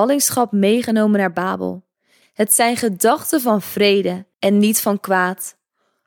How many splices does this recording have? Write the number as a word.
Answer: two